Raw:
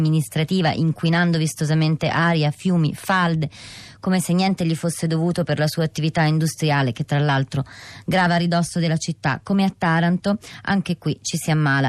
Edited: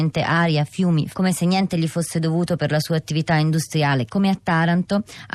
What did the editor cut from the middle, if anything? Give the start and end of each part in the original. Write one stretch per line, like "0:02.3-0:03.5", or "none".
0:03.0-0:04.0
0:06.9-0:09.4